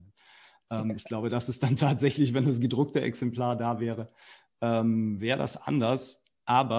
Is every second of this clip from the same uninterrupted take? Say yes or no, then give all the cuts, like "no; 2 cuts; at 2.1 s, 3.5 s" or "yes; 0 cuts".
yes; 0 cuts